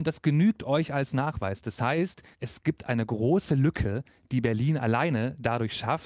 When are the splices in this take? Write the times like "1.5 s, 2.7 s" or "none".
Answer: 2.3 s